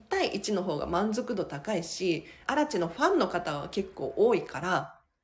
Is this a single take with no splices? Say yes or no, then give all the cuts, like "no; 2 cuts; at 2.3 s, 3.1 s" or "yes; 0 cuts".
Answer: no; 1 cut; at 2.4 s